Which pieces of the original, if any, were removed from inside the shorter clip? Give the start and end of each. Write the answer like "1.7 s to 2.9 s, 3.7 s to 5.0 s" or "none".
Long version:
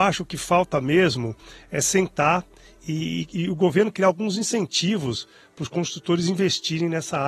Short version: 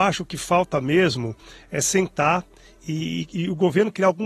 none

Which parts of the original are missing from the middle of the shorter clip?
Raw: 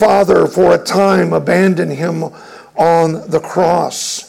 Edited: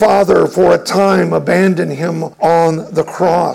2.3 s to 2.7 s

